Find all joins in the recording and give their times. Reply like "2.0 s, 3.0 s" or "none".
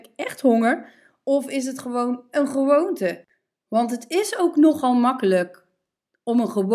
none